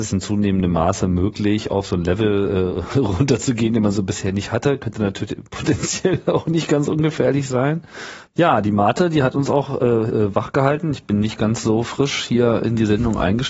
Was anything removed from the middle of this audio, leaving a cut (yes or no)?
yes